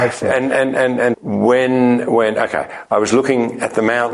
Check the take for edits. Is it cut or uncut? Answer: cut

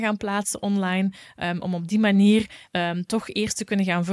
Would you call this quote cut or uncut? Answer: cut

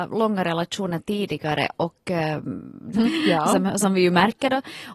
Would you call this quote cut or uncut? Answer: cut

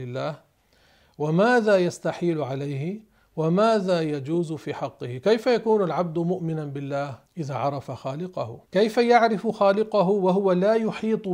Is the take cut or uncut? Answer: cut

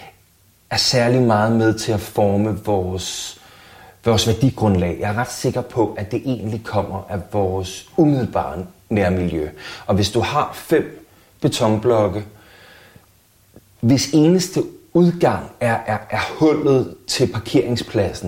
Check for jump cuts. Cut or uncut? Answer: uncut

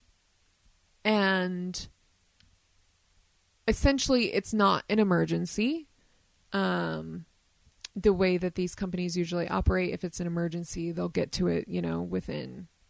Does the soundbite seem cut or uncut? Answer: cut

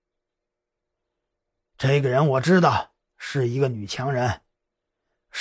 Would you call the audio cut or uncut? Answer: uncut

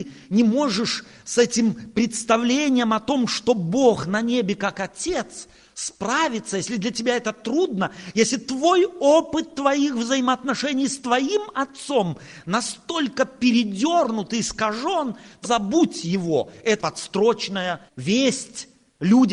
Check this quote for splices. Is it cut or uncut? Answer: cut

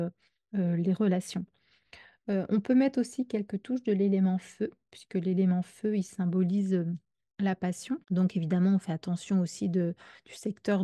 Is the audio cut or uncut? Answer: cut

